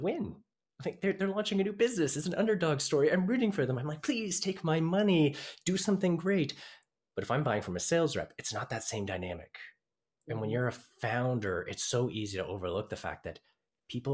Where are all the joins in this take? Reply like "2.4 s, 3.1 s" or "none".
none